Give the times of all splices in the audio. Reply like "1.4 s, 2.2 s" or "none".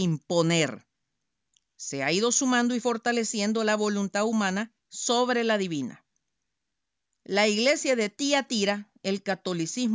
4.8 s